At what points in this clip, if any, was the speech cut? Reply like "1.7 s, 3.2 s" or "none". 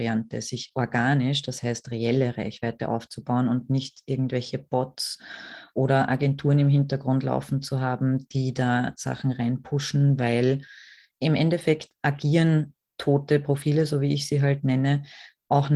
none

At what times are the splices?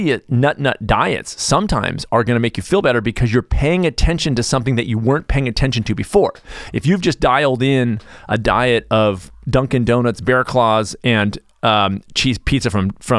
none

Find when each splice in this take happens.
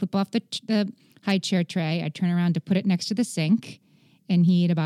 none

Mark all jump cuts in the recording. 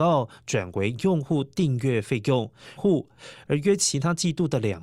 2.8 s

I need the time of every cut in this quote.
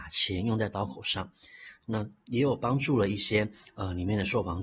none

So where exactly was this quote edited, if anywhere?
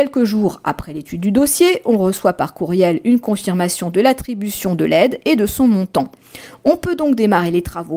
none

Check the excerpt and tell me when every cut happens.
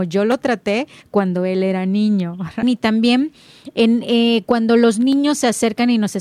2.6 s

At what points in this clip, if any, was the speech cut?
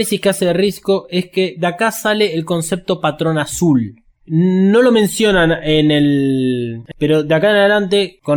6.9 s

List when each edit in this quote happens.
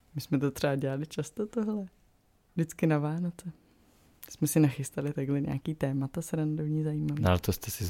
none

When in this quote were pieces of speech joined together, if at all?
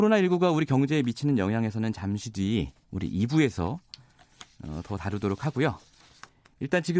none

